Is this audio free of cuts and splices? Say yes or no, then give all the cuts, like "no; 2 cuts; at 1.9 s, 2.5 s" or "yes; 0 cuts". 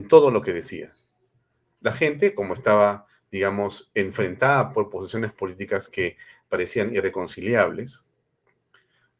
yes; 0 cuts